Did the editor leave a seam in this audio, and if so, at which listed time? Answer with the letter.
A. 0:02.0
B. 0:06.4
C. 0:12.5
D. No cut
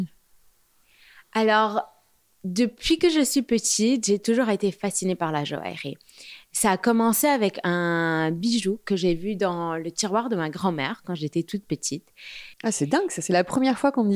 C